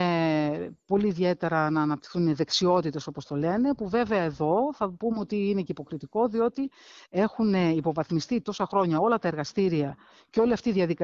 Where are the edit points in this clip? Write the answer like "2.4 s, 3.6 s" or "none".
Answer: none